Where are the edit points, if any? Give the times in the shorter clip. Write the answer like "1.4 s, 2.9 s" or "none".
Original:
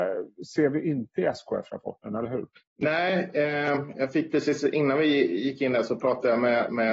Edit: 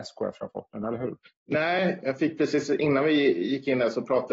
2.0 s